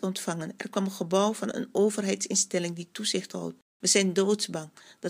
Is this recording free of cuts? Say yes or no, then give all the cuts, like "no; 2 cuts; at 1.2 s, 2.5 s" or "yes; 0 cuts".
no; 1 cut; at 3.8 s